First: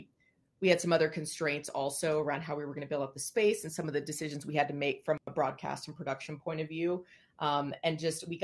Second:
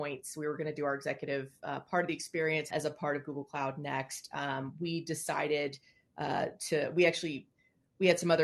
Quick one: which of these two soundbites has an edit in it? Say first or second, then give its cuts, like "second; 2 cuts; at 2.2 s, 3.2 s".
second; 1 cut; at 2.7 s